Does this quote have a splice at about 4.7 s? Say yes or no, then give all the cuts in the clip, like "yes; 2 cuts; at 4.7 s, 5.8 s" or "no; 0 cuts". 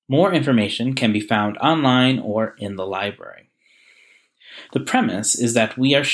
yes; 1 cut; at 4.7 s